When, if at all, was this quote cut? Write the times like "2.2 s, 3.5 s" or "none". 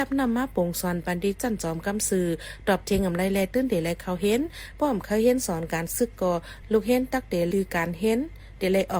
7.5 s

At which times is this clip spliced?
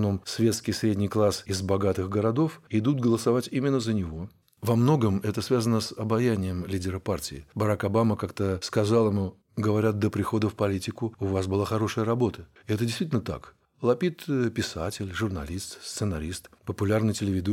4.4 s

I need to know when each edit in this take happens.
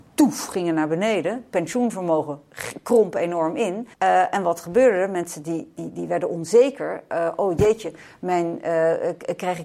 3.9 s

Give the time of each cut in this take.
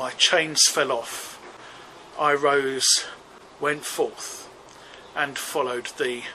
2.1 s

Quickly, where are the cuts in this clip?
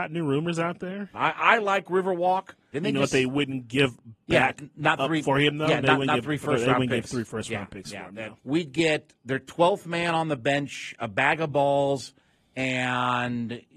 1.1 s, 2.7 s, 8.4 s

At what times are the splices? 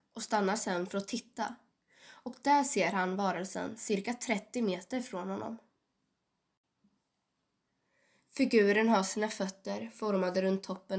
none

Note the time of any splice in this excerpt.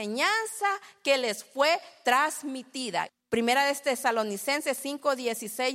3.1 s

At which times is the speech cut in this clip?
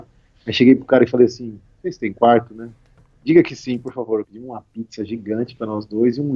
4.2 s

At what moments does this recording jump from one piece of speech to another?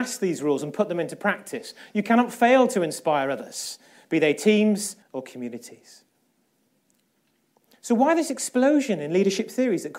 5.0 s

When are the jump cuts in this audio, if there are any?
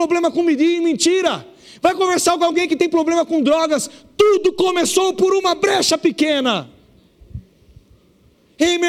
none

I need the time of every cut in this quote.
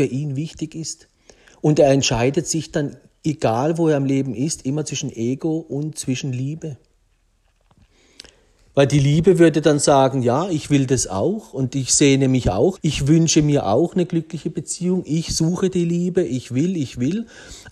12.8 s, 16.2 s

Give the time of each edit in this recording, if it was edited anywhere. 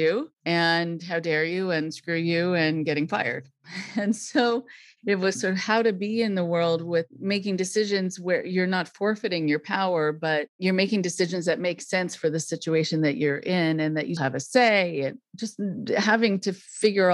14.2 s

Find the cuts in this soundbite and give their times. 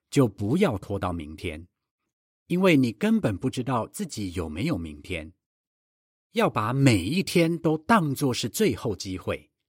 none

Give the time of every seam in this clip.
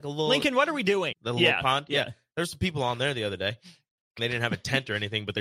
1.1 s, 4.2 s

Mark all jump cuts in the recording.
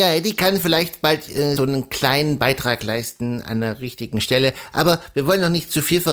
1.6 s

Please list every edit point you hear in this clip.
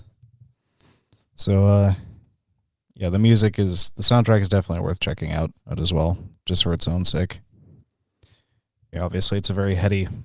5.6 s, 8.9 s

